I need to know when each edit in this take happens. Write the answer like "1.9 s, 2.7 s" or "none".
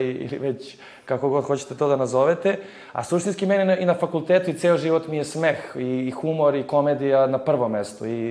none